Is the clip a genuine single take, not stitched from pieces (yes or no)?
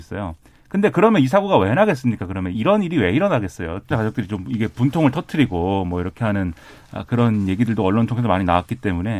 no